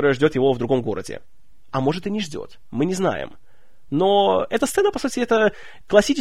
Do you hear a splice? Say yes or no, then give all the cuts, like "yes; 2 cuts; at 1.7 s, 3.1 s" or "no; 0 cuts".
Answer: no; 0 cuts